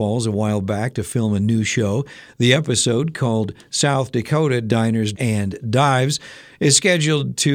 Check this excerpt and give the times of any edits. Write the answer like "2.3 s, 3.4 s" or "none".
5.1 s